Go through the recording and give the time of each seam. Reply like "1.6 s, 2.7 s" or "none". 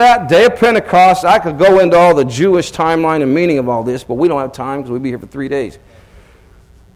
none